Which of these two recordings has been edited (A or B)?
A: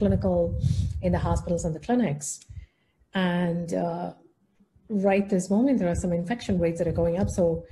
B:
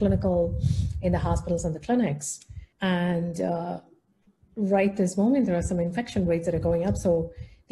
B